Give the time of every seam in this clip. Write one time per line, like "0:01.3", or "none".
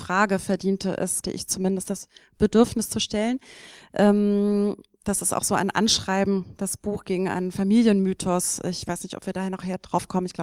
0:01.2